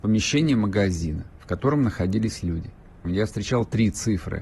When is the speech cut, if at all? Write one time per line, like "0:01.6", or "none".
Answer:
0:03.0